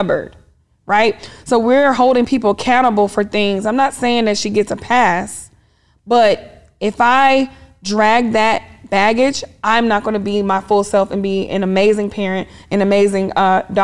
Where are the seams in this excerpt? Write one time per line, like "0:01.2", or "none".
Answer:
0:12.6